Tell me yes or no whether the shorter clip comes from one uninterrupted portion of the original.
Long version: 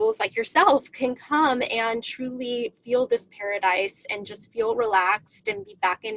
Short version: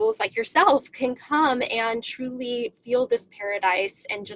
yes